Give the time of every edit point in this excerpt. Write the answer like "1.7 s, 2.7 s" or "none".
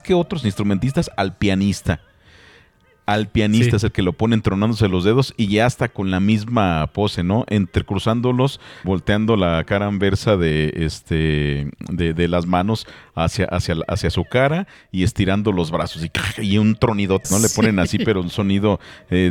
8.8 s, 17.2 s